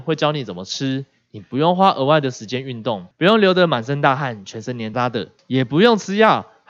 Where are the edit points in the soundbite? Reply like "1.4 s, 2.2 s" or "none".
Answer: 4.9 s